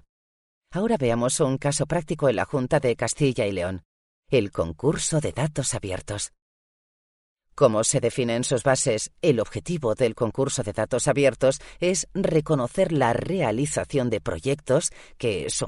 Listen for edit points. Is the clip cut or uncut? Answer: uncut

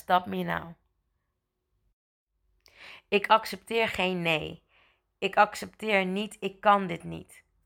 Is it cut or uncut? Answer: uncut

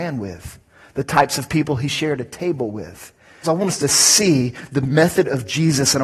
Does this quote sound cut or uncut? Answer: cut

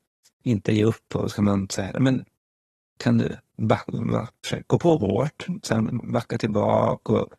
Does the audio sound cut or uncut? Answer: cut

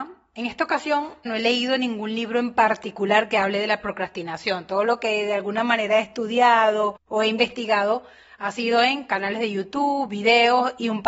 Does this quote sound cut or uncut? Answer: cut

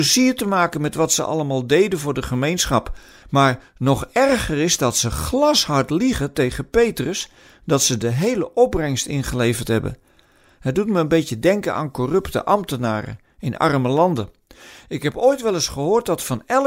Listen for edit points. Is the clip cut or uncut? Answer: cut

